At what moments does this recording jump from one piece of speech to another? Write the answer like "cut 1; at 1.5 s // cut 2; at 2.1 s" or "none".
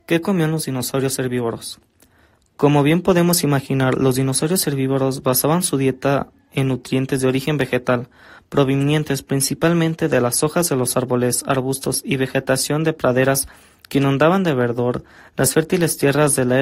none